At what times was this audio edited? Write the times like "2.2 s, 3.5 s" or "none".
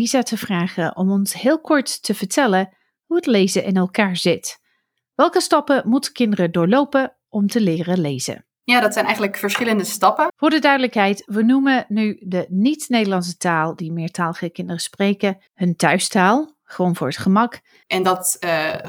10.3 s, 15.5 s, 17.8 s